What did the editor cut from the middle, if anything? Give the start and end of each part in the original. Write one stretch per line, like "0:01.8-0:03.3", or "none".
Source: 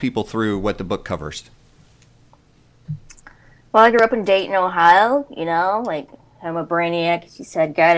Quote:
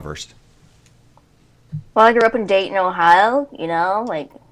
0:03.0-0:03.7

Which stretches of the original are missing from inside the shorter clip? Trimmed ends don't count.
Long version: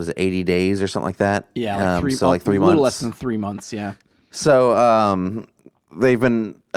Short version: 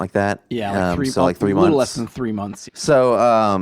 0:03.7-0:04.2

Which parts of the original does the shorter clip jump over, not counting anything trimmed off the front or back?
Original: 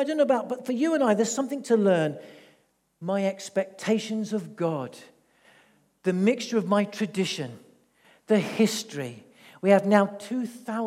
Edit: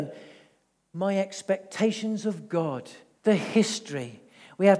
0:05.2-0:08.2

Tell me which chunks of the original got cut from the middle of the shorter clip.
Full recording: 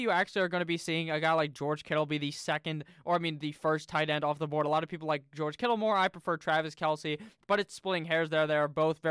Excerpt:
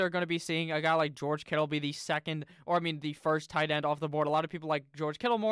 none

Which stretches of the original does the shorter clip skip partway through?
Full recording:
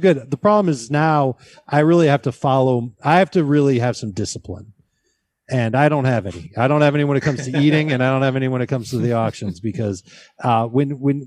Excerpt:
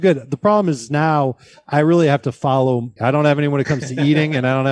0:03.0-0:06.5

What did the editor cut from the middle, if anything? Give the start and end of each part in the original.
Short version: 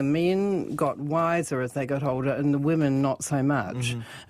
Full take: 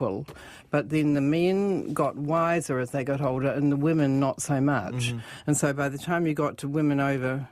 none

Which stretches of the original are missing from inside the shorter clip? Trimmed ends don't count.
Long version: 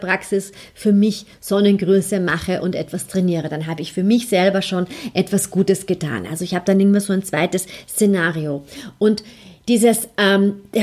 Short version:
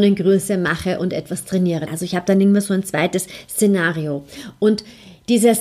0:03.5-0:06.3

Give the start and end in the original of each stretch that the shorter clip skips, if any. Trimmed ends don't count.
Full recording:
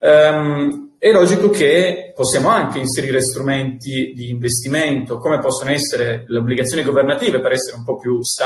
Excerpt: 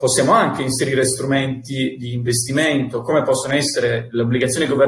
none

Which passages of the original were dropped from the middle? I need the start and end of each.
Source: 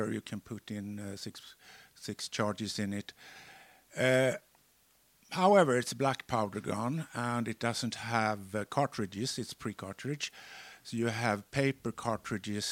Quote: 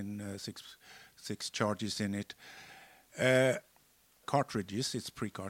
0:05.0-0:08.7

